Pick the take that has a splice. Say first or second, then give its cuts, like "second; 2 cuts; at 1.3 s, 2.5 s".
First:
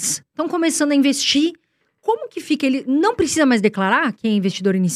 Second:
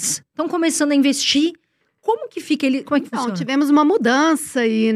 second; 1 cut; at 2.8 s